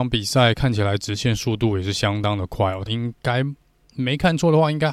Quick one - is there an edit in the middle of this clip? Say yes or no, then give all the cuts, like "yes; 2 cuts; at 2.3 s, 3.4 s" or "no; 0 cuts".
yes; 1 cut; at 2.9 s